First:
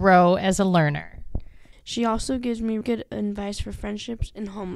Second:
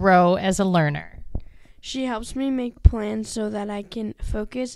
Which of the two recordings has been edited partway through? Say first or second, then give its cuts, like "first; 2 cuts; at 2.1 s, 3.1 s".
first; 2 cuts; at 1.7 s, 2.8 s